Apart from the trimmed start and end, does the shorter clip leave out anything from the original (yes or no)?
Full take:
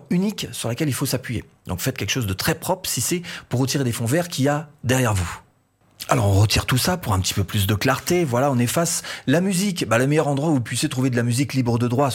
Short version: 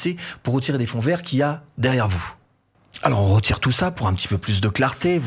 no